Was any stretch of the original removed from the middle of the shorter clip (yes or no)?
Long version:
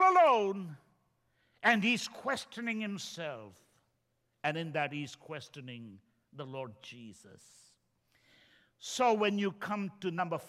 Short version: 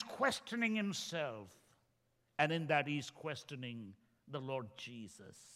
no